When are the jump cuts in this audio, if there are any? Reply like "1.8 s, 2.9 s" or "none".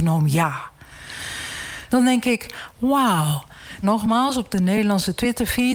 1.9 s, 3.8 s